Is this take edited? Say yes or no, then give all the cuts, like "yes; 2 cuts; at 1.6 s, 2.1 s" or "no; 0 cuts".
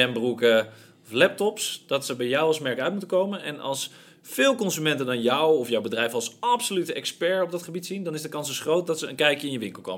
no; 0 cuts